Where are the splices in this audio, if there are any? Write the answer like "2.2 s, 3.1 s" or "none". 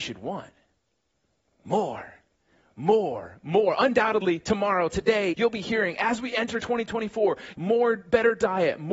5.3 s, 7.5 s